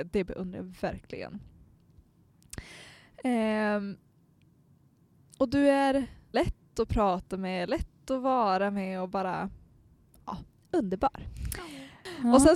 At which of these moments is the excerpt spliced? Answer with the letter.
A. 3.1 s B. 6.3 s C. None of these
B